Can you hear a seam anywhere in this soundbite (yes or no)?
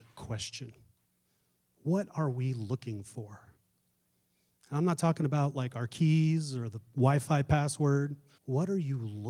yes